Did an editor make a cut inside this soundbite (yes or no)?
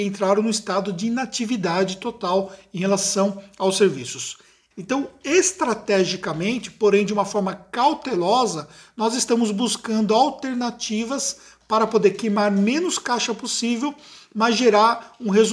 yes